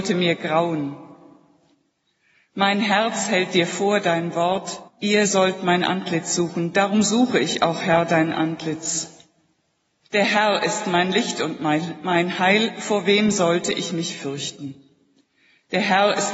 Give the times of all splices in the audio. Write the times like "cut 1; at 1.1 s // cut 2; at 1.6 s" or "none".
cut 1; at 4.9 s // cut 2; at 10.0 s